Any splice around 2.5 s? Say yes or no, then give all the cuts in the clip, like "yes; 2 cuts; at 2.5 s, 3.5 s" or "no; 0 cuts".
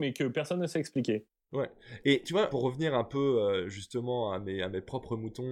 yes; 1 cut; at 2.5 s